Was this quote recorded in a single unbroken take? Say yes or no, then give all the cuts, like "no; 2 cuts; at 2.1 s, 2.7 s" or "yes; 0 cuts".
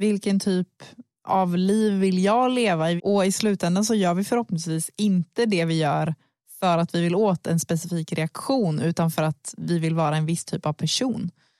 no; 1 cut; at 3.0 s